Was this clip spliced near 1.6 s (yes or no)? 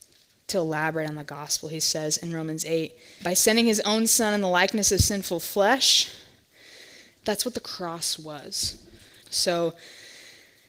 no